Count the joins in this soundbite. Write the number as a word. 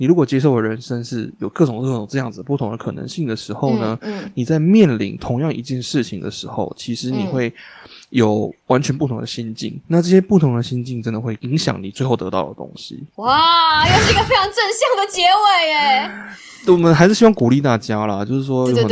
one